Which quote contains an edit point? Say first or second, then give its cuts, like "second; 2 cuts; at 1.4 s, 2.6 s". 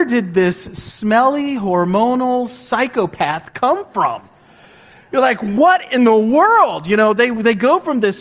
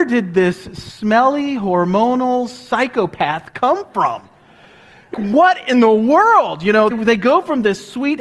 second; 2 cuts; at 5.1 s, 6.9 s